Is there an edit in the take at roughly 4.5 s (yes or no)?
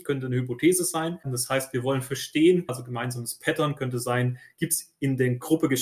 no